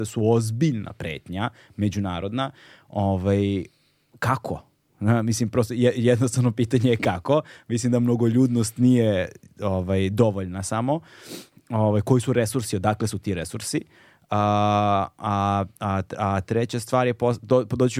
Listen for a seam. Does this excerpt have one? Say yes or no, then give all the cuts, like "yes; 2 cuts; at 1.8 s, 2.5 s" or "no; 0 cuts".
no; 0 cuts